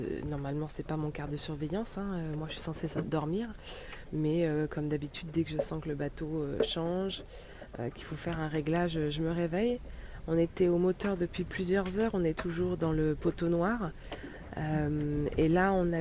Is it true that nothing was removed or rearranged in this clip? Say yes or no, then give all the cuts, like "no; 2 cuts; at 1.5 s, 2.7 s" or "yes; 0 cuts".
yes; 0 cuts